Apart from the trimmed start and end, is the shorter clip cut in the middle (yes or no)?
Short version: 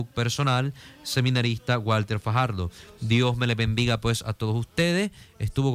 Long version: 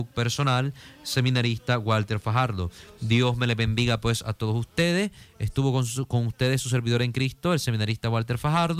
no